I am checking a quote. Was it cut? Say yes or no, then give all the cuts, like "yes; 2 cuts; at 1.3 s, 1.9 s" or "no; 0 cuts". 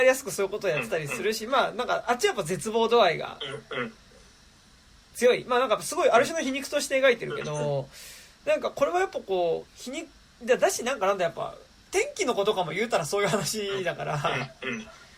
no; 0 cuts